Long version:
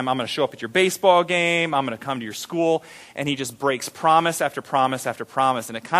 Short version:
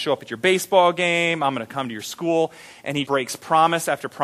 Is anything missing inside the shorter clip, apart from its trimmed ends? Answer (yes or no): yes